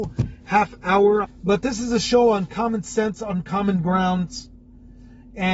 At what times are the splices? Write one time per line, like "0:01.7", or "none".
0:01.2